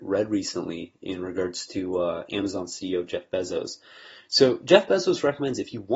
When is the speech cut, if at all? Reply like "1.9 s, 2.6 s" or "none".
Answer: none